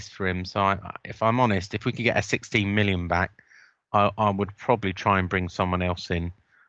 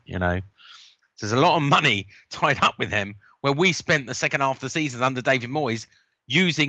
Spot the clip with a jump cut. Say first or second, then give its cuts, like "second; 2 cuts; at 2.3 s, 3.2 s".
second; 1 cut; at 1.0 s